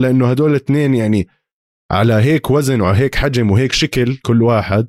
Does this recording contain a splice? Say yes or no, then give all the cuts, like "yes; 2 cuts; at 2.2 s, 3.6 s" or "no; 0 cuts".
no; 0 cuts